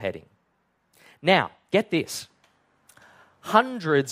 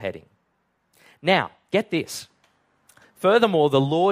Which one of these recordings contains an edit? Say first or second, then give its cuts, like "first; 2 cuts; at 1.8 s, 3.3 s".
second; 1 cut; at 3.0 s